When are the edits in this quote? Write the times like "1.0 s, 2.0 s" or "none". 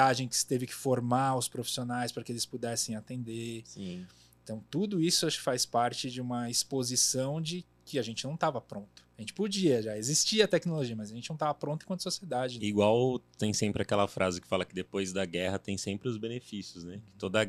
12.6 s